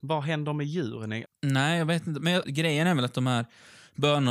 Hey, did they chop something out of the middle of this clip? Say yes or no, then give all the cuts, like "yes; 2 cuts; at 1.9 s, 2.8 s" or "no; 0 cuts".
yes; 2 cuts; at 1.2 s, 2.4 s